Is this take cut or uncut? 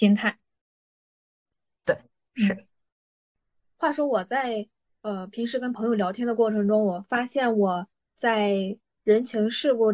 uncut